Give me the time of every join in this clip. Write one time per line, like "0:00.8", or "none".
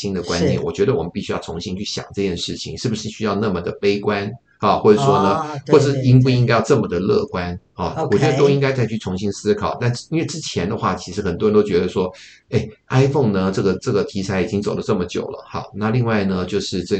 none